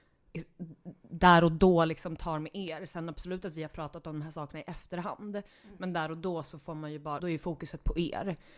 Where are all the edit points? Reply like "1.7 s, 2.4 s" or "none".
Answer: 7.2 s